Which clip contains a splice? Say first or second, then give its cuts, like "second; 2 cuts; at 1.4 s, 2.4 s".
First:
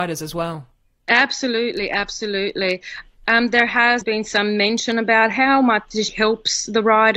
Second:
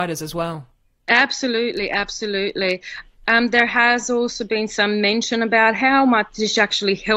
first; 2 cuts; at 4.0 s, 6.1 s